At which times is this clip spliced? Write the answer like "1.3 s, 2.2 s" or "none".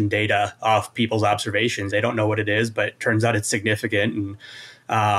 1.9 s